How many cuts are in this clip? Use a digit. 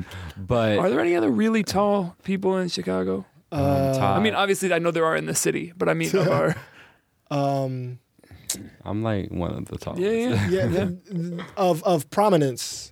0